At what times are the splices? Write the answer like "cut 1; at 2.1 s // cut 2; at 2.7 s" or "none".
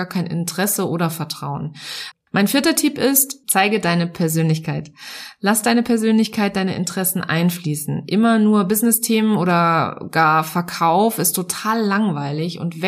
cut 1; at 2.1 s // cut 2; at 3.4 s